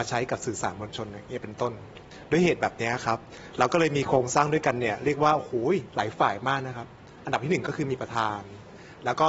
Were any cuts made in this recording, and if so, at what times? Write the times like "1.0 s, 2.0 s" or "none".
5.9 s